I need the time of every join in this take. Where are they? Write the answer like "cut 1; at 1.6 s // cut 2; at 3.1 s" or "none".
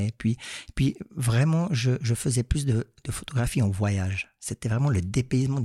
none